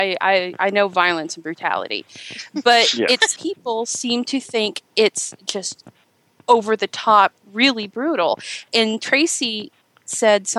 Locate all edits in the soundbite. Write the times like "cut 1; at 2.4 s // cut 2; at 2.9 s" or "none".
cut 1; at 3.4 s // cut 2; at 7.4 s